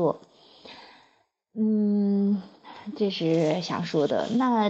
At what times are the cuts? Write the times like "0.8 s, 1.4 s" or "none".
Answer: none